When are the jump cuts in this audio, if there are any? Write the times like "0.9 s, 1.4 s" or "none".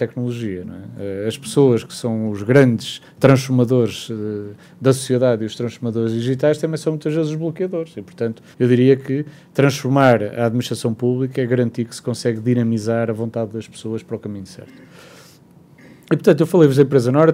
8.5 s